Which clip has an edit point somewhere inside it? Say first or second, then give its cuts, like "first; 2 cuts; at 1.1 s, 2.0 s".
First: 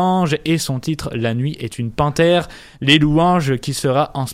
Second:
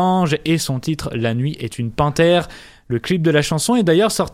first; 1 cut; at 2.7 s